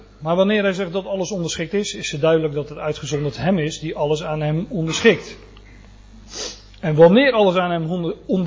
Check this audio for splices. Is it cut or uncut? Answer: uncut